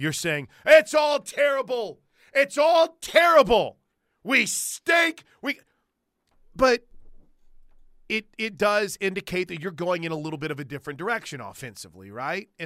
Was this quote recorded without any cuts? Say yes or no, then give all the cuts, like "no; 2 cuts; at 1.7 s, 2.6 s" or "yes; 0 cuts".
yes; 0 cuts